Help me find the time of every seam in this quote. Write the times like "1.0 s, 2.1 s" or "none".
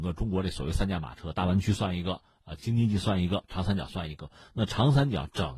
none